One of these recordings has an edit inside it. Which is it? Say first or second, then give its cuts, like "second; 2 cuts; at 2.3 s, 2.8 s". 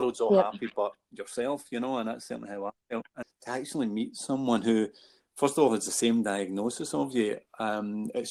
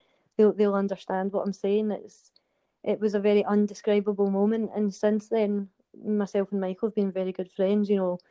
first; 1 cut; at 3.2 s